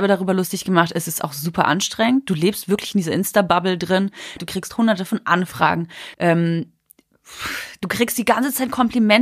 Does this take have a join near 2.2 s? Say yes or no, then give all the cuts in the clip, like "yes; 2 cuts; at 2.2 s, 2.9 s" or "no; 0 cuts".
no; 2 cuts; at 4.4 s, 6.1 s